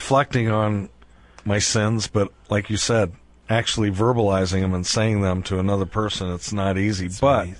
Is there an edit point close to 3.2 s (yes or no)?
no